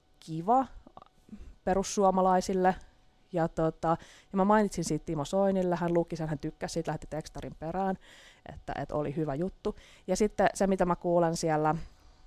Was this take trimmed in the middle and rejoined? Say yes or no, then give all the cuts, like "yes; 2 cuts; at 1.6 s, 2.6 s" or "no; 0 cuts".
no; 0 cuts